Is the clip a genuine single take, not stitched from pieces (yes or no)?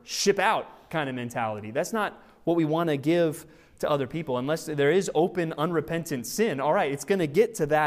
yes